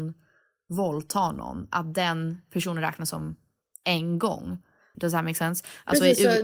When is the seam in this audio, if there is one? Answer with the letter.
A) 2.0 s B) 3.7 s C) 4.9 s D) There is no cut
C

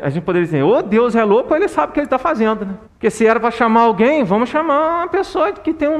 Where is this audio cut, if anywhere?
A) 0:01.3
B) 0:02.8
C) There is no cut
B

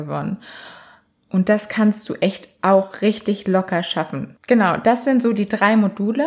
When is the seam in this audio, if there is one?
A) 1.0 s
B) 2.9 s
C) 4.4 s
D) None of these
C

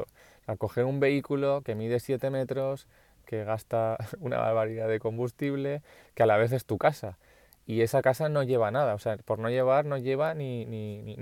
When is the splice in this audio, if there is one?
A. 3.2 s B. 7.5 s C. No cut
A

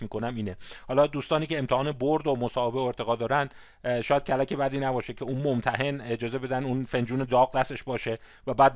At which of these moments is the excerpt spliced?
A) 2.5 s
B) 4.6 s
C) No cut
C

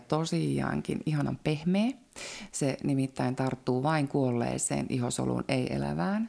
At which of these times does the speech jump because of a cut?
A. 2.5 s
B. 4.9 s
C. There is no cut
A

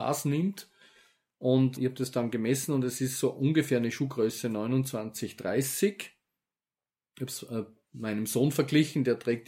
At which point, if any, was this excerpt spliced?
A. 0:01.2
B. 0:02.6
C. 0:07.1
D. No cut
D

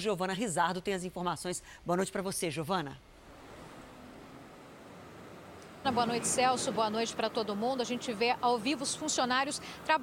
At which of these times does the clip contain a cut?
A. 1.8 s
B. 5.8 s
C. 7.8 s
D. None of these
B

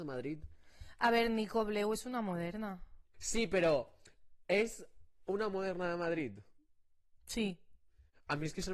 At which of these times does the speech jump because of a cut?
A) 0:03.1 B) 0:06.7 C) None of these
A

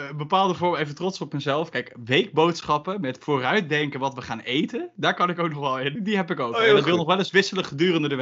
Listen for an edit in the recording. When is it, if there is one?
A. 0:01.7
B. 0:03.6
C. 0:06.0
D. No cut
C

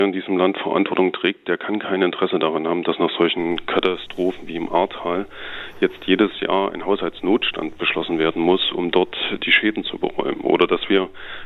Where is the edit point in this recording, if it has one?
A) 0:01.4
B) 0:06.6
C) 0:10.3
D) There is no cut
D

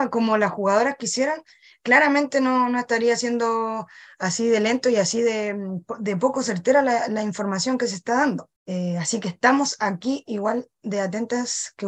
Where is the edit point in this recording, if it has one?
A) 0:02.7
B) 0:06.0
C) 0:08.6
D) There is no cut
C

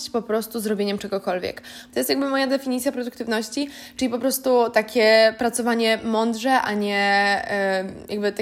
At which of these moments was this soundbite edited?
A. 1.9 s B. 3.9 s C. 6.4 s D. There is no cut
A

